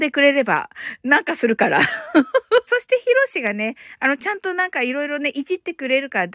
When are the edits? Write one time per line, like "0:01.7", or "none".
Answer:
0:02.7

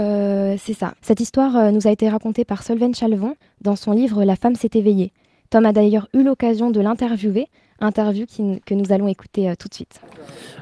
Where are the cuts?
0:01.0

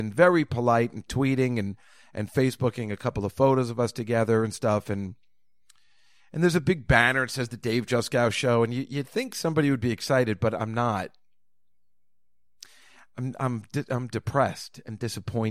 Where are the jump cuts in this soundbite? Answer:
none

